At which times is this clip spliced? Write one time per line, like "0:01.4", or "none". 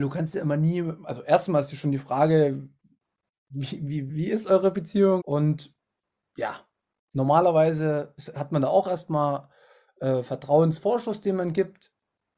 0:04.1
0:05.2